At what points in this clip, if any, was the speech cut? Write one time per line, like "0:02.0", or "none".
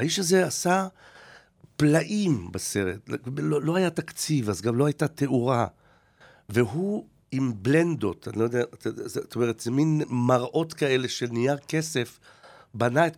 none